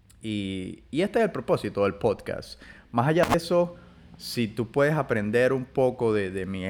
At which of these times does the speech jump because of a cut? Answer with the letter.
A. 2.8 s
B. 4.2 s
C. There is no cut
C